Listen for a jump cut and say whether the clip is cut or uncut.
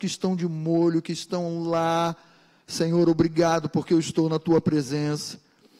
uncut